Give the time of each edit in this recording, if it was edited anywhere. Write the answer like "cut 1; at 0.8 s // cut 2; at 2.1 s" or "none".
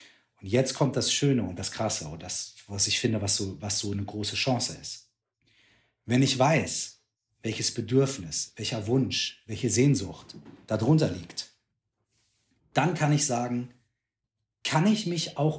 none